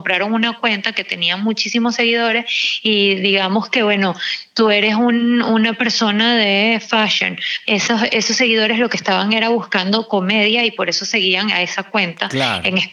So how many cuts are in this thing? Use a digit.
1